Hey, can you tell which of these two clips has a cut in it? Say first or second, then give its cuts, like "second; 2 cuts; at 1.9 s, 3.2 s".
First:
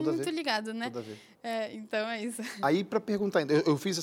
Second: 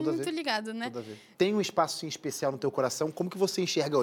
second; 1 cut; at 1.3 s